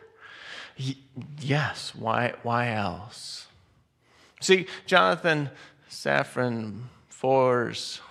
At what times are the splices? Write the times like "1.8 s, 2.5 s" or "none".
none